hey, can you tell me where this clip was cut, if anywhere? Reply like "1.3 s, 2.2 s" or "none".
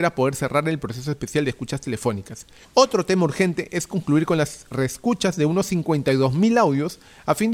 2.6 s